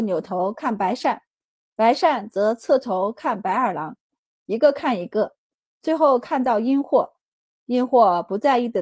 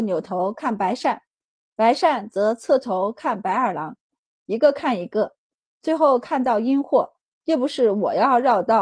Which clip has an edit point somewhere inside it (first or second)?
second